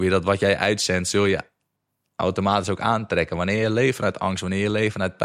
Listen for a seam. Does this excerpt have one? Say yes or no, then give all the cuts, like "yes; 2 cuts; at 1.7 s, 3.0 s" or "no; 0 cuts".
no; 0 cuts